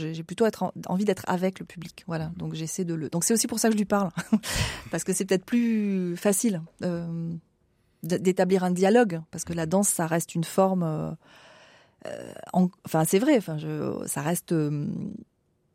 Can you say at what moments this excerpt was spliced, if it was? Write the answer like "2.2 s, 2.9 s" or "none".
none